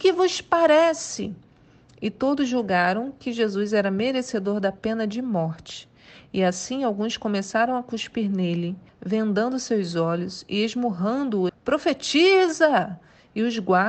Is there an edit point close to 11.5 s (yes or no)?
yes